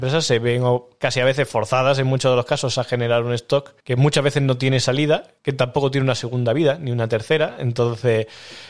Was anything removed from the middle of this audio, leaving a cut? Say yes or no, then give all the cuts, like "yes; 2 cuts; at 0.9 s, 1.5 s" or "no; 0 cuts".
yes; 2 cuts; at 3.8 s, 5.4 s